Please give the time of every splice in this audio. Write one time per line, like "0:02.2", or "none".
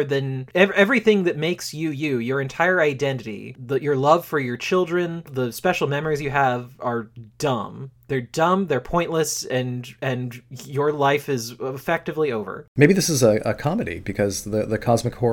none